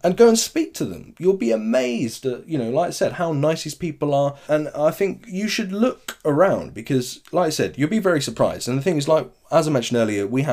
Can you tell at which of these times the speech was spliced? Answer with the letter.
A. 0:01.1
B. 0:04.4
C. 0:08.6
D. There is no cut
B